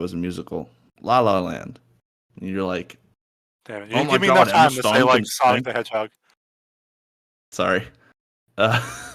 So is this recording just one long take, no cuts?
yes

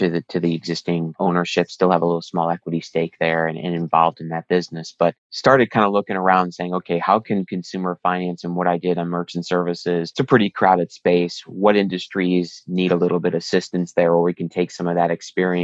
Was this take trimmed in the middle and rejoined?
no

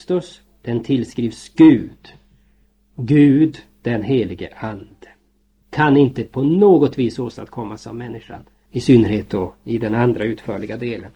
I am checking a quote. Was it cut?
yes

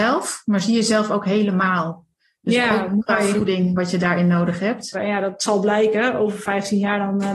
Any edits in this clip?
yes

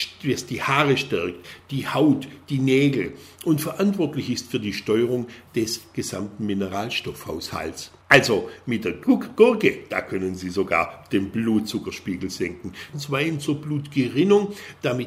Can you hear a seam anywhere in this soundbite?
yes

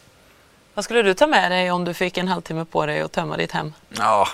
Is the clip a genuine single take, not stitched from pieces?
yes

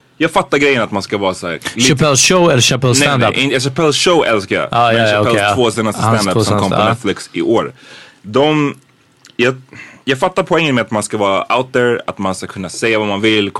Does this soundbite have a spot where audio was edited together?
no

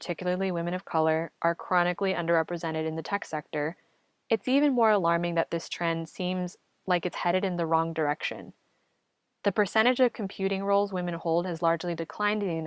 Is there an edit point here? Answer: no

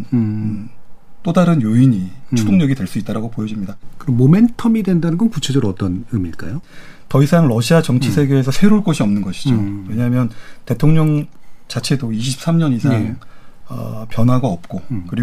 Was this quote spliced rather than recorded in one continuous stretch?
no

